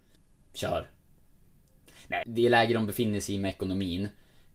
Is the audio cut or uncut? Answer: cut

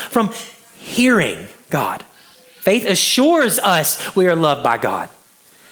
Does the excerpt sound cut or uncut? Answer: uncut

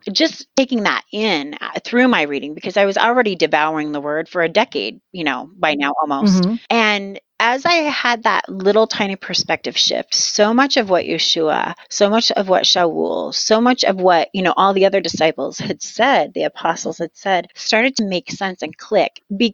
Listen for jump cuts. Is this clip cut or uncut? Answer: uncut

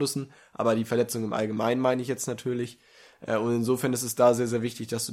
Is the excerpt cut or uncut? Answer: uncut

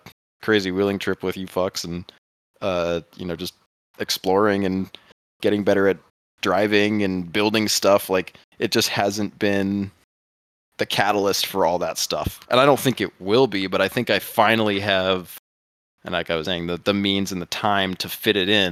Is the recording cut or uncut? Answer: cut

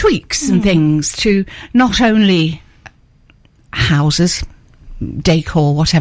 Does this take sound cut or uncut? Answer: uncut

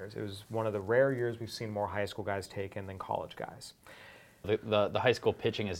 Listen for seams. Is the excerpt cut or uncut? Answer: cut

